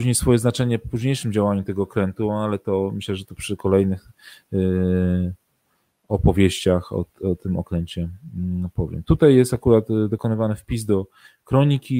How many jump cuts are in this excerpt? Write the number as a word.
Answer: zero